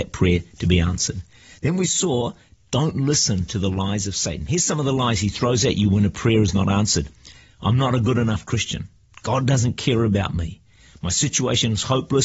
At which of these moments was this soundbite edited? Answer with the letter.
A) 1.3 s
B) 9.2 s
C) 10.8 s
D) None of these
D